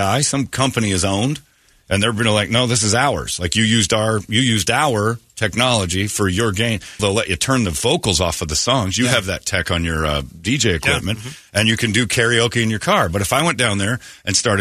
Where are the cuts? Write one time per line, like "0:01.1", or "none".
0:07.0